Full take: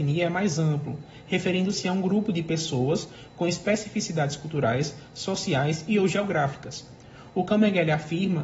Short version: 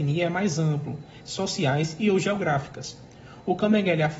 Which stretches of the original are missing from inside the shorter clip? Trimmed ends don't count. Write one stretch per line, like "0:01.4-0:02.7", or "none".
0:01.2-0:05.1